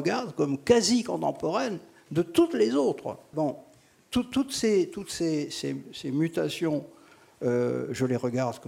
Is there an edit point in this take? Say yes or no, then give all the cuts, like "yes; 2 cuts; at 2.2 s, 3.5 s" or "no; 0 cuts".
yes; 1 cut; at 3.3 s